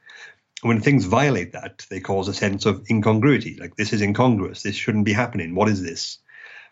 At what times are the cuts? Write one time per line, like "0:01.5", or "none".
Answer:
none